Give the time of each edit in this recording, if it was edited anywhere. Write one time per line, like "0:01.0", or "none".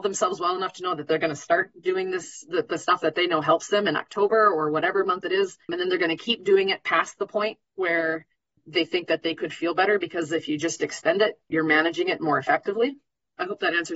0:05.6